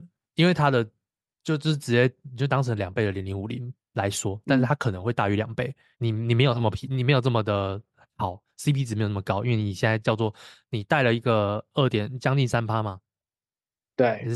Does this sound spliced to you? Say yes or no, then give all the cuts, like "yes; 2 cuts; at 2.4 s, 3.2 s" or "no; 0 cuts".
yes; 1 cut; at 5.9 s